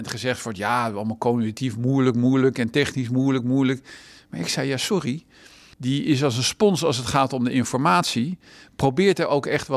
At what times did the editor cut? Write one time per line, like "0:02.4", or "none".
0:05.7